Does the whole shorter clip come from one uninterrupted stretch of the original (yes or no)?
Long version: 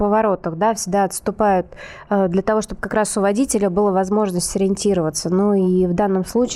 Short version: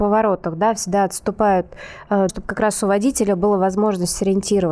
no